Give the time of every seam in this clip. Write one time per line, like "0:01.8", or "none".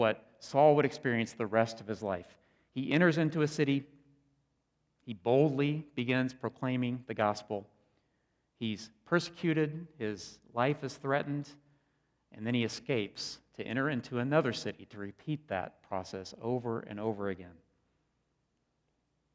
none

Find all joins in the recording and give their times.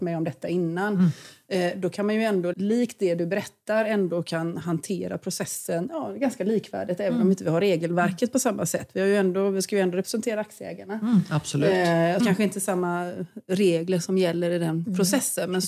0:02.5
0:12.2

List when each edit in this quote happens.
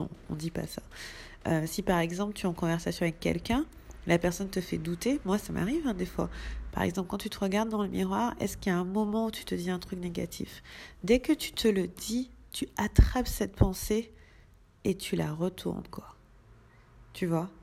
0:06.7

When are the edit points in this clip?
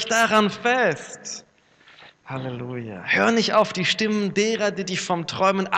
none

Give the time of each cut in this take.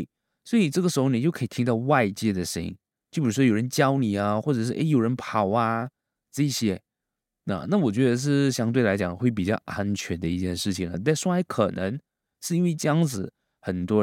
none

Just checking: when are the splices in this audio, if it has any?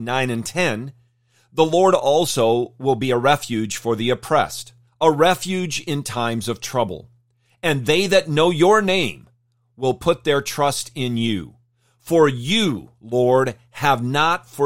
none

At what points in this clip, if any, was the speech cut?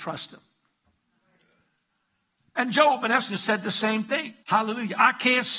0:04.4

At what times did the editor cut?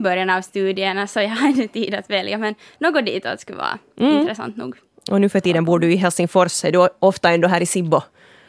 none

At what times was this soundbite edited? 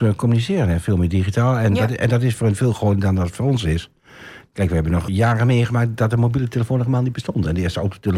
0:05.1

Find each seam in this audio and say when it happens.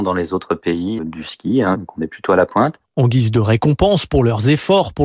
0:01.0

